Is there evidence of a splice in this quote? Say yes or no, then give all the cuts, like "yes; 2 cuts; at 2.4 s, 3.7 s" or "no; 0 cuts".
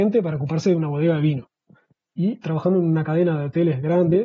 yes; 1 cut; at 2.0 s